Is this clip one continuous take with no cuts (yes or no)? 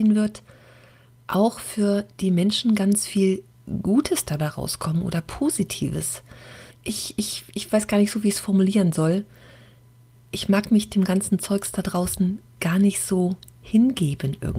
no